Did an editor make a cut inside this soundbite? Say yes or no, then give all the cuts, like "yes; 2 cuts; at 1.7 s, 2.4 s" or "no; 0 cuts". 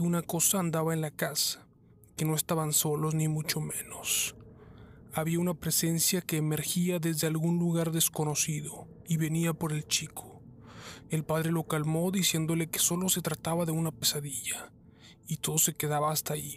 yes; 1 cut; at 11.1 s